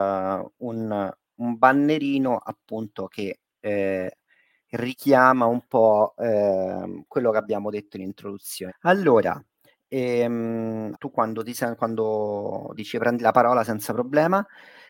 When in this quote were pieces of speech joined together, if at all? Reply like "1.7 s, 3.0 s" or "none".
8.7 s, 10.9 s, 12.8 s